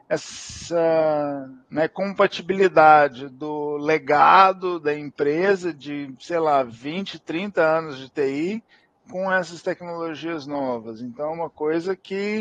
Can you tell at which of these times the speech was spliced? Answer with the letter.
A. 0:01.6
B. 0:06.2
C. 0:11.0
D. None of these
A